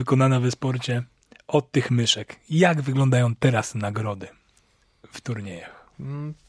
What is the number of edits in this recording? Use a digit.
0